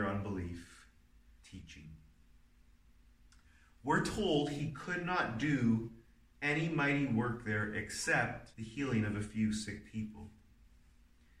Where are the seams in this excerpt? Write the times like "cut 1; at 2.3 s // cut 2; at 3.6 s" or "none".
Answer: cut 1; at 1.4 s // cut 2; at 8.5 s